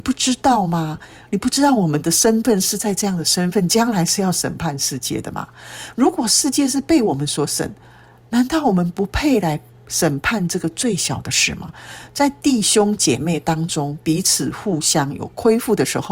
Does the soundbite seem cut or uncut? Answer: uncut